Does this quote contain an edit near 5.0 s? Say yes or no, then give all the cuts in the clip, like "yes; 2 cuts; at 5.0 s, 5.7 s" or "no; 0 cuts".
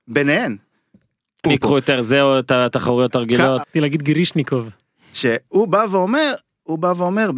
no; 2 cuts; at 1.4 s, 3.6 s